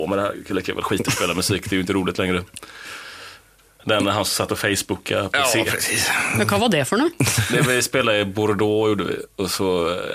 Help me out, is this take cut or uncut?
cut